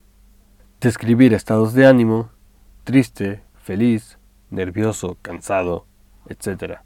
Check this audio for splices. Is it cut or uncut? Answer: cut